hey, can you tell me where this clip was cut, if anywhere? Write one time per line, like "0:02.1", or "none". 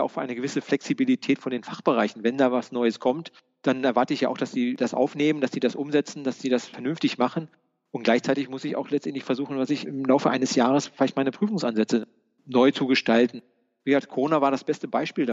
none